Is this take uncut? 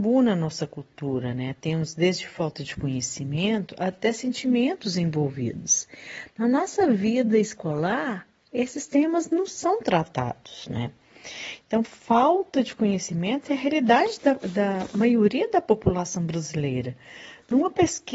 yes; 0 cuts

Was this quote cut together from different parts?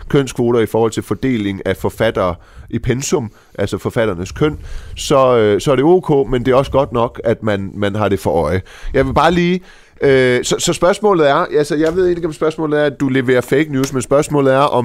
no; 0 cuts

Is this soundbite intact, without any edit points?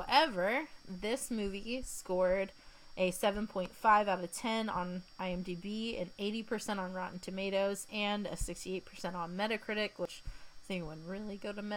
yes; 0 cuts

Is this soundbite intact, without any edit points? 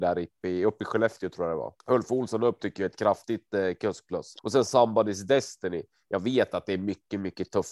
no; 2 cuts; at 1.8 s, 4.4 s

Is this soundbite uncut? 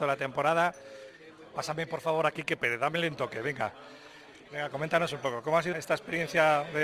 no; 2 cuts; at 4.5 s, 5.7 s

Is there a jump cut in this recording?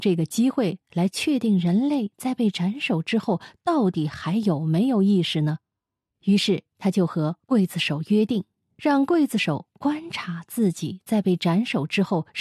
no; 0 cuts

